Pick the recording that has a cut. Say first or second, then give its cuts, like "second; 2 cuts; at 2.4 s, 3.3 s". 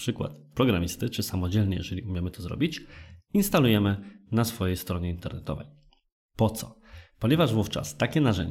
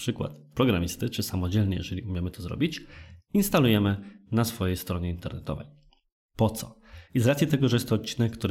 second; 1 cut; at 7.1 s